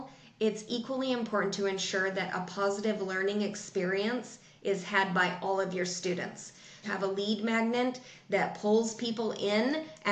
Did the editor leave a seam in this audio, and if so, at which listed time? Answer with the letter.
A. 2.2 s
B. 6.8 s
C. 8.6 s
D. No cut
B